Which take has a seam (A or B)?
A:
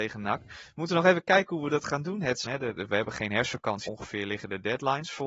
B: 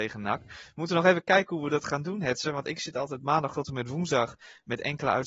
A